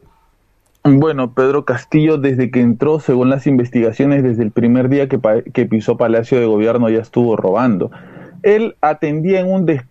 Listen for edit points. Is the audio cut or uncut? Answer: uncut